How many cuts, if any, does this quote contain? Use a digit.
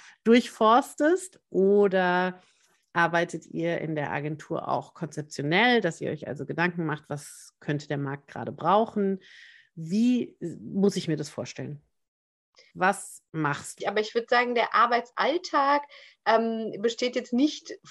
2